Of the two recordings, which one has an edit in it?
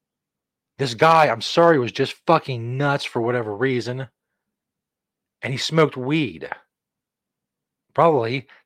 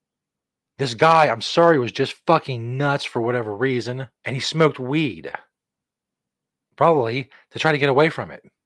second; 1 cut; at 4.2 s

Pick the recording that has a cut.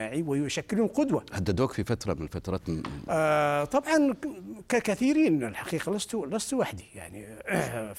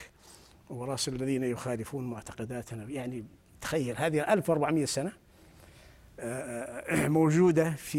first; 1 cut; at 1.3 s

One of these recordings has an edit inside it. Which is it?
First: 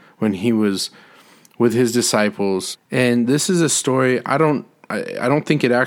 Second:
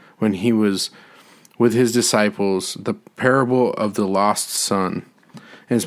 first; 1 cut; at 2.7 s

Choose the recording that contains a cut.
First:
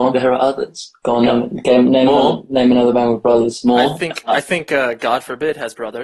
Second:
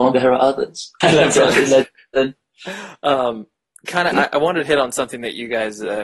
second; 1 cut; at 1.0 s

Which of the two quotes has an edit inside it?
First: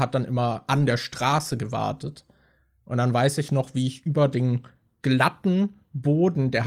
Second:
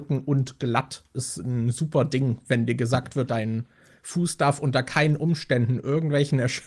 second; 1 cut; at 3.3 s

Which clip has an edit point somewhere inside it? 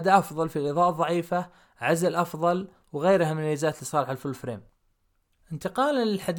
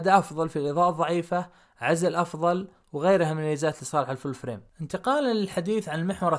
second; 1 cut; at 4.7 s

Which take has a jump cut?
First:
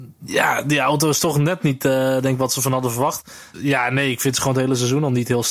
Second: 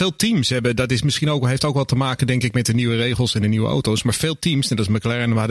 first; 1 cut; at 3.5 s

